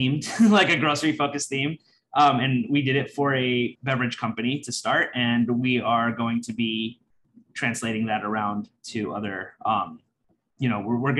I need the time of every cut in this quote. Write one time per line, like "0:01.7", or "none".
0:03.7